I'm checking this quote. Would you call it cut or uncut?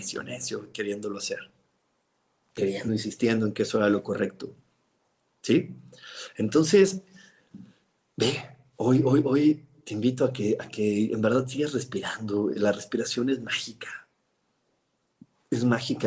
cut